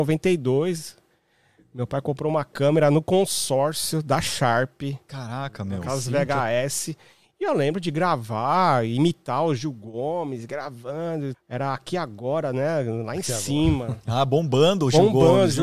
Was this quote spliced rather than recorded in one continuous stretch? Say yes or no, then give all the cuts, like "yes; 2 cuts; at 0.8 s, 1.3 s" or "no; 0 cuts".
yes; 1 cut; at 11.3 s